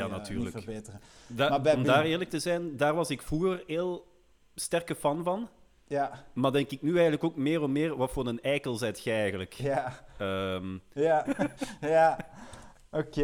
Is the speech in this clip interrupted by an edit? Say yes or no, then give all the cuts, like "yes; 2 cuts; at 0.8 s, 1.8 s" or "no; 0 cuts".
yes; 1 cut; at 11.3 s